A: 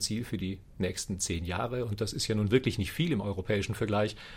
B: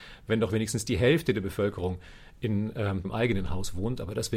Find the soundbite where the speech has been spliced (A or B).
B